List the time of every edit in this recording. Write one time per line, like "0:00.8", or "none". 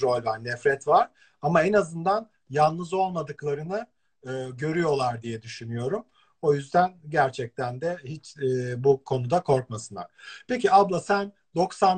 none